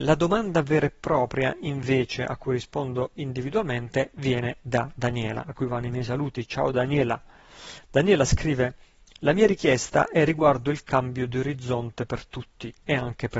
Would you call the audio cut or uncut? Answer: uncut